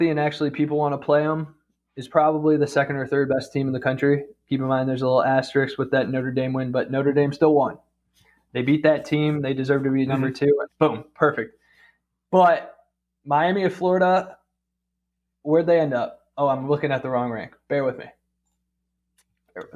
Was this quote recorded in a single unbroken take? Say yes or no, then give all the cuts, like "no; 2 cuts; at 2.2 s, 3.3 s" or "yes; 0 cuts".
no; 1 cut; at 10.7 s